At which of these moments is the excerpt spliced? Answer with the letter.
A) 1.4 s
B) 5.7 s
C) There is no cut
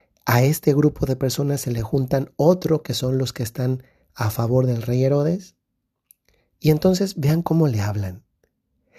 C